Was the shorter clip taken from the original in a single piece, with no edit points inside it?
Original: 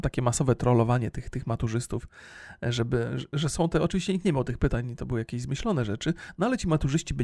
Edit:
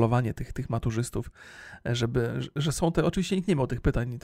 yes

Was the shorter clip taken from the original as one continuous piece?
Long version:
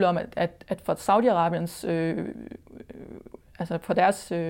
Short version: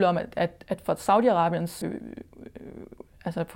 no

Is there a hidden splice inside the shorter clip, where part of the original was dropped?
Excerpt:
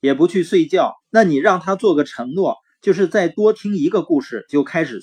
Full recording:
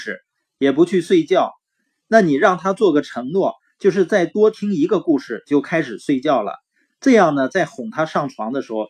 yes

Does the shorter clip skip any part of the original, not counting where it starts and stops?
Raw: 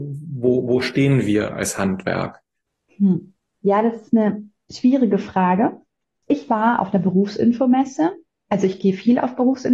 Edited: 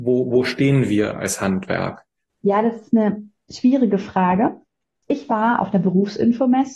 yes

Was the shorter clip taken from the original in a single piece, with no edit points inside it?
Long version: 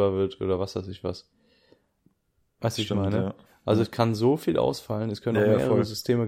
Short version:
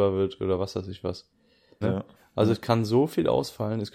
no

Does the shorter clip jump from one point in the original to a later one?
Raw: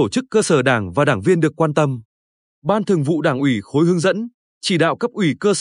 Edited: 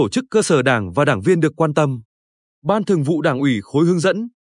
no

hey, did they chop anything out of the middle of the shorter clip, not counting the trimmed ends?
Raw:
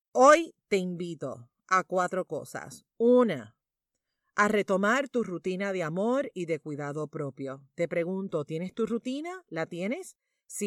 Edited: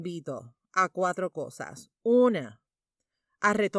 no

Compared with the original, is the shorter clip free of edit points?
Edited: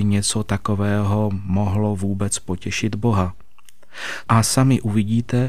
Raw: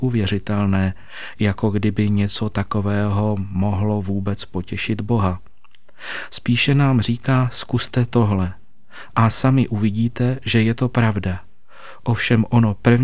no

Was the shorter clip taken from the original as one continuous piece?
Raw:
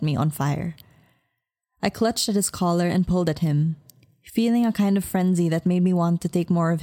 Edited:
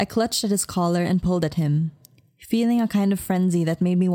yes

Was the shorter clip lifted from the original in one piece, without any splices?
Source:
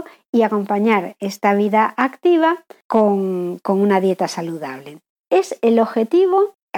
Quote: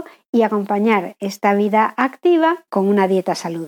no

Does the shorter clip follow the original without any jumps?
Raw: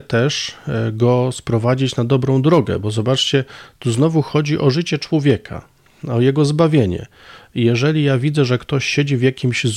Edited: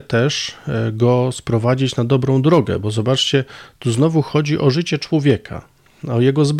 yes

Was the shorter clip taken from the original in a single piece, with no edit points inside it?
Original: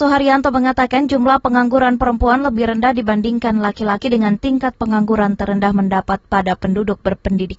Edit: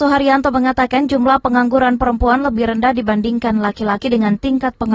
yes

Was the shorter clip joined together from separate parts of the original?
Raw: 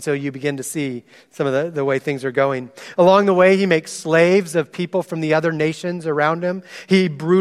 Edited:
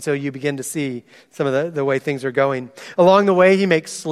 no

